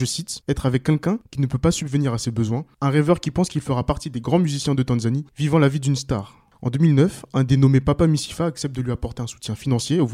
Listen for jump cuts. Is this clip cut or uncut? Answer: uncut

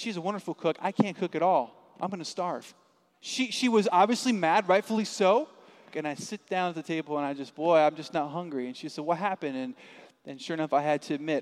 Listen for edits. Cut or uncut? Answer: cut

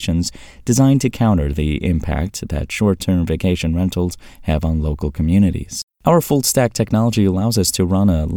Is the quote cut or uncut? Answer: cut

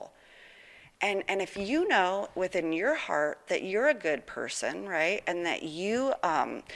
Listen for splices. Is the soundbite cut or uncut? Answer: uncut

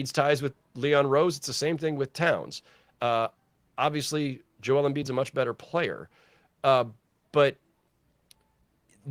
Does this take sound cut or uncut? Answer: uncut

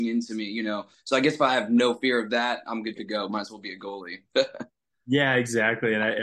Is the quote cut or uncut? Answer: uncut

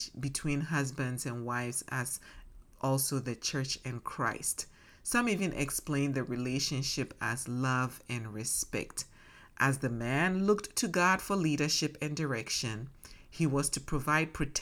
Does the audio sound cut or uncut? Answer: uncut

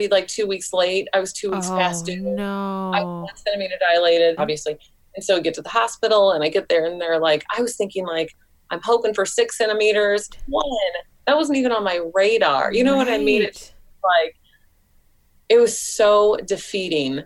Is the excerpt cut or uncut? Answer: cut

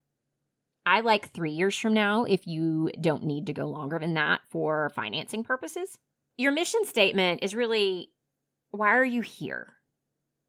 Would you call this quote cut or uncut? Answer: uncut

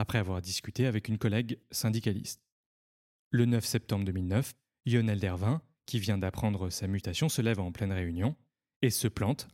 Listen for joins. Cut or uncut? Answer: uncut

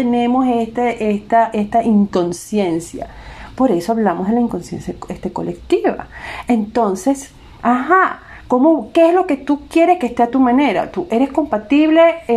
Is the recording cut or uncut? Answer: cut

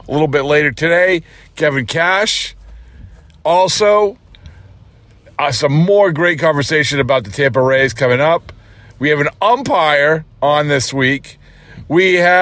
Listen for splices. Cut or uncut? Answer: uncut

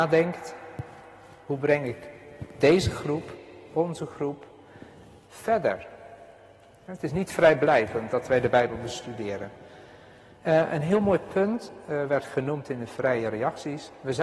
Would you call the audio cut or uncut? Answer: uncut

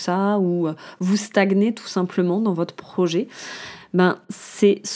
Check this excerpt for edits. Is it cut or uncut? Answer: uncut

